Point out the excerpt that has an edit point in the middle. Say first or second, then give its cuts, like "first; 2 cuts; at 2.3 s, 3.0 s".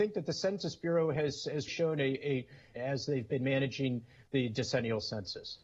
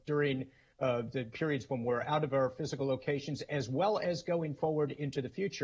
first; 2 cuts; at 1.7 s, 2.8 s